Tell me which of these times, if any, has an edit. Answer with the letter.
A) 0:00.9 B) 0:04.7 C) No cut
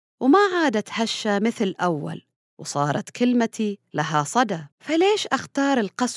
B